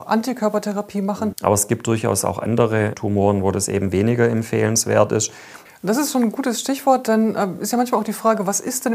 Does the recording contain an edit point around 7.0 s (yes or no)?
no